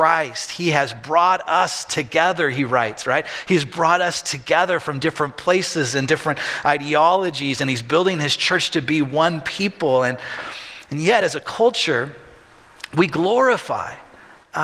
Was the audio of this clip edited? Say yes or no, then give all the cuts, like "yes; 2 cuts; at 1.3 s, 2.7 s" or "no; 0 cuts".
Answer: no; 0 cuts